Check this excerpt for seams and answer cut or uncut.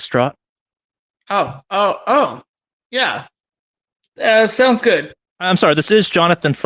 uncut